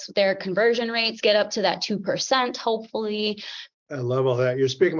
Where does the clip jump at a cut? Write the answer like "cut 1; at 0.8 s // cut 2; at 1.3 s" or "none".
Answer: cut 1; at 3.7 s